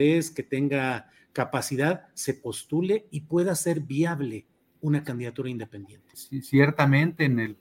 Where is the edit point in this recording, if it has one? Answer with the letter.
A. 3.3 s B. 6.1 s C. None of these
B